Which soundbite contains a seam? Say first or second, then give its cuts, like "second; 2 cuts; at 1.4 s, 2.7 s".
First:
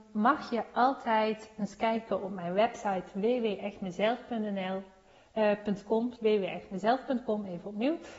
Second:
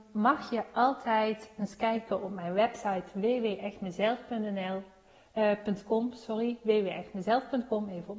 first; 1 cut; at 6.2 s